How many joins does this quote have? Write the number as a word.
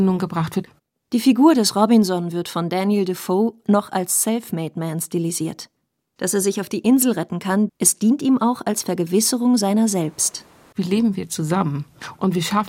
three